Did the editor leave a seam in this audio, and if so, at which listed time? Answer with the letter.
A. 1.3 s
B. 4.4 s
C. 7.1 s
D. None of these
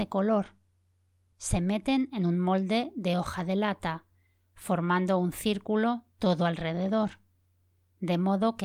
A